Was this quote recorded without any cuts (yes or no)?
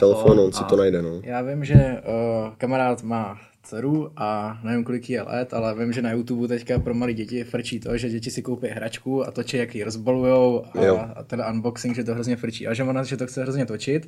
yes